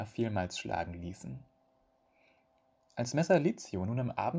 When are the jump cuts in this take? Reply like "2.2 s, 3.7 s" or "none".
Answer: 2.8 s